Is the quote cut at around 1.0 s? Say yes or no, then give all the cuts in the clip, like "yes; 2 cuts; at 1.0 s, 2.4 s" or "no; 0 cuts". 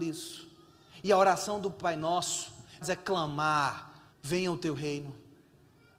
no; 2 cuts; at 2.8 s, 4.1 s